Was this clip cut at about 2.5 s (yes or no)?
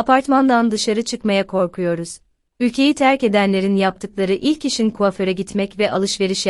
yes